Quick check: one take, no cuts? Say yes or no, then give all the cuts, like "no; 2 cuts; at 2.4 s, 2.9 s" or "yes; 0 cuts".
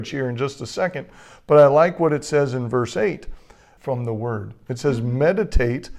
no; 1 cut; at 3.8 s